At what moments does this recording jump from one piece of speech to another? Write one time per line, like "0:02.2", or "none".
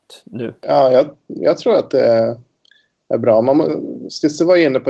none